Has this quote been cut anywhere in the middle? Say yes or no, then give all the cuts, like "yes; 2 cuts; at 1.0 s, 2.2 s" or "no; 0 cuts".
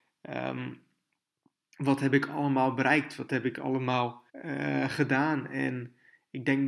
yes; 1 cut; at 4.3 s